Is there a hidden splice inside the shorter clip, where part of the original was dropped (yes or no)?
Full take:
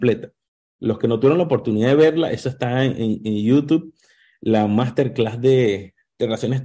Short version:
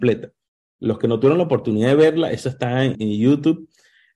yes